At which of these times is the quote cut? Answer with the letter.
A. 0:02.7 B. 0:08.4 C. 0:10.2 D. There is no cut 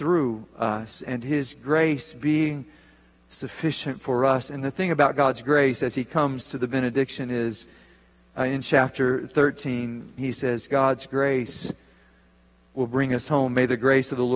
C